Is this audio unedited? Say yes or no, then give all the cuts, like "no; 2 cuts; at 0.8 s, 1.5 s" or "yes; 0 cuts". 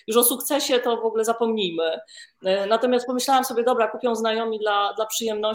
yes; 0 cuts